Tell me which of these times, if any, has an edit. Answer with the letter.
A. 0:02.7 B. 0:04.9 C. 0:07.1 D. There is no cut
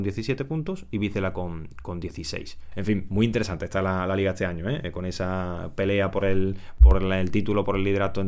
A